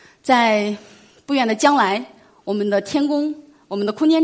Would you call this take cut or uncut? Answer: uncut